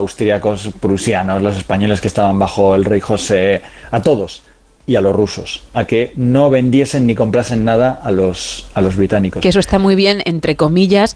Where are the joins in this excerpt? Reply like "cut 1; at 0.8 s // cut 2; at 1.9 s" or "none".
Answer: none